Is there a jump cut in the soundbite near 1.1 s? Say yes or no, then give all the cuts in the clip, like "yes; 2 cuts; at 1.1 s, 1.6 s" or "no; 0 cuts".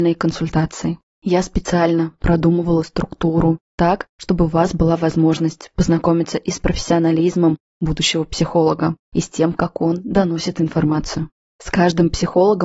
yes; 2 cuts; at 1.1 s, 11.5 s